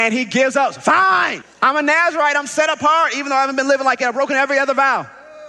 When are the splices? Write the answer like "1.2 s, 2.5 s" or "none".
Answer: 1.4 s